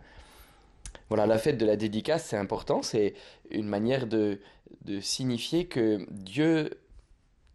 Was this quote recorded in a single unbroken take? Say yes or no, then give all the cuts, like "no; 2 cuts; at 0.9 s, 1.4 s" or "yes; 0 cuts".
yes; 0 cuts